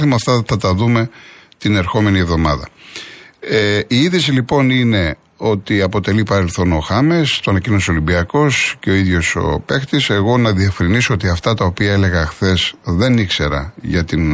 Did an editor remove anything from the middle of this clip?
no; 0 cuts

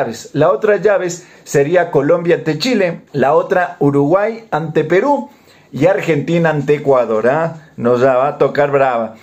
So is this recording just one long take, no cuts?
no; 1 cut; at 3.1 s

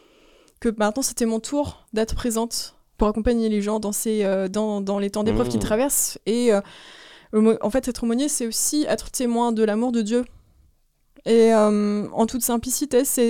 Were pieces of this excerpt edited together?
no; 0 cuts

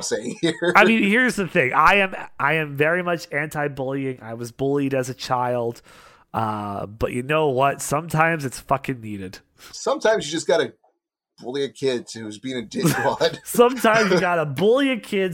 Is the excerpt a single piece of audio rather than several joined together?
yes; 0 cuts

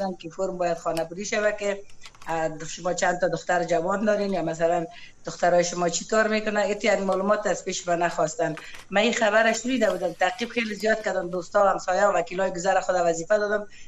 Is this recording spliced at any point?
no; 0 cuts

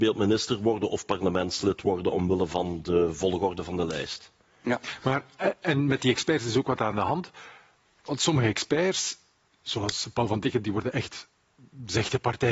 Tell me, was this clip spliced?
no; 0 cuts

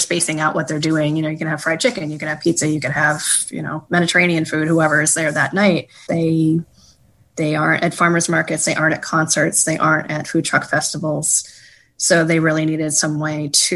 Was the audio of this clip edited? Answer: yes; 1 cut; at 6.1 s

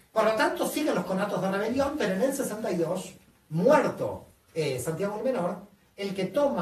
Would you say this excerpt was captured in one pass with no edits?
yes; 0 cuts

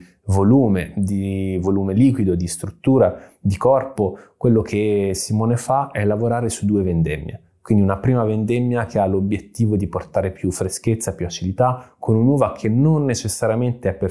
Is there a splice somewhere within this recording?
no; 0 cuts

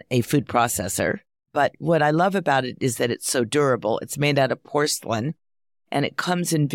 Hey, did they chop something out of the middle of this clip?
no; 0 cuts

